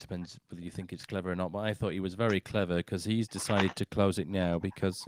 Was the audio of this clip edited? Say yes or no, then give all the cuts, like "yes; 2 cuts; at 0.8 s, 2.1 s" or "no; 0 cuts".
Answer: no; 0 cuts